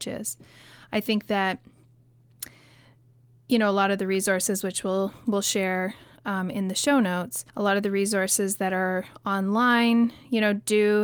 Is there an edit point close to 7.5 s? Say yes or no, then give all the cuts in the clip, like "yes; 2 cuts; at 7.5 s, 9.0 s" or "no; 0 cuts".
yes; 1 cut; at 7.5 s